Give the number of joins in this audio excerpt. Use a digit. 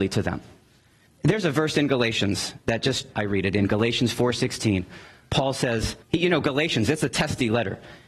3